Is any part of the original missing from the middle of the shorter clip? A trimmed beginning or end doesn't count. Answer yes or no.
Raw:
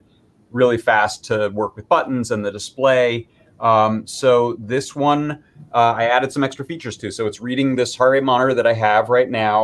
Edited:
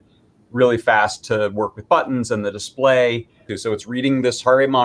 yes